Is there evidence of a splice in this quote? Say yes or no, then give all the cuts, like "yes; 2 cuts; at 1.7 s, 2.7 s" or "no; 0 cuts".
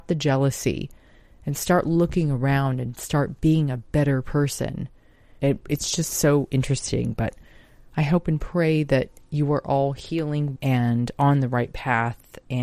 yes; 2 cuts; at 5.4 s, 10.6 s